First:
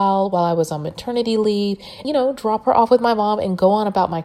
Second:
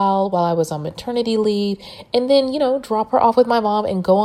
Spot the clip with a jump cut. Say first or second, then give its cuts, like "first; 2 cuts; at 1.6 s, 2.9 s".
first; 1 cut; at 2.0 s